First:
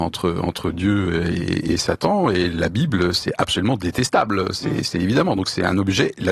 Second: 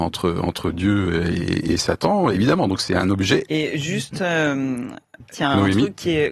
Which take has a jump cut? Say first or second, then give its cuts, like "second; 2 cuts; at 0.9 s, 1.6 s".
second; 3 cuts; at 2.3 s, 3.5 s, 5.3 s